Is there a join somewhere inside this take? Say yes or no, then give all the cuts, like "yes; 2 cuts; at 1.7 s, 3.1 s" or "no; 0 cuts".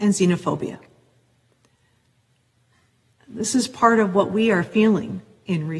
yes; 1 cut; at 3.1 s